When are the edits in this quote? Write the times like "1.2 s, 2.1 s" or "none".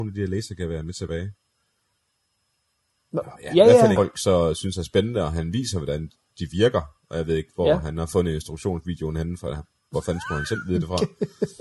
4.0 s